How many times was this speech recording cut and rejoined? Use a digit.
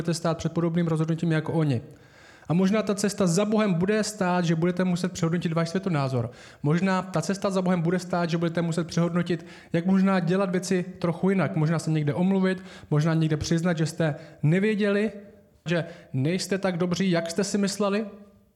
1